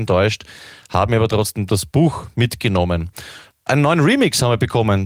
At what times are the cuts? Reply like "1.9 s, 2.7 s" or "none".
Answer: 3.5 s